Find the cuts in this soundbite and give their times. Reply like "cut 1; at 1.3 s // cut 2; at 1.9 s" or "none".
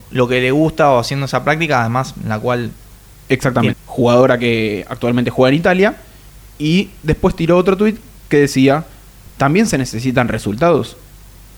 cut 1; at 3.7 s // cut 2; at 9.3 s